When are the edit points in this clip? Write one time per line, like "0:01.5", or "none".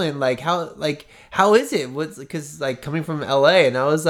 none